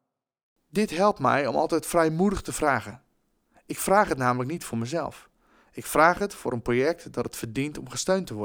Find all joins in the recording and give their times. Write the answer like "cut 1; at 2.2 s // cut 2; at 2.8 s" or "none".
none